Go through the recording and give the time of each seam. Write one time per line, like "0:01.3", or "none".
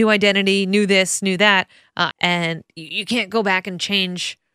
0:02.1